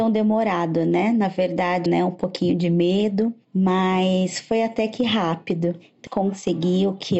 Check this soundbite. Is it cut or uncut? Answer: cut